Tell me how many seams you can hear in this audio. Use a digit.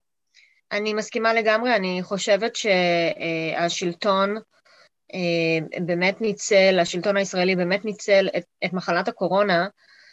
1